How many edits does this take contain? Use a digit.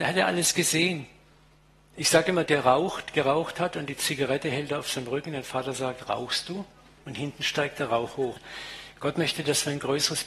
3